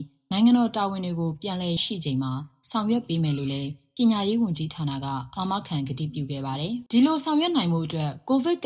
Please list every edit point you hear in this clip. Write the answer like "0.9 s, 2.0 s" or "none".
1.8 s, 6.9 s